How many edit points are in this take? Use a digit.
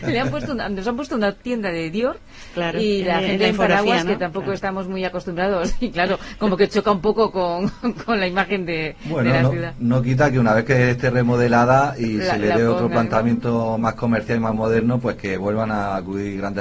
0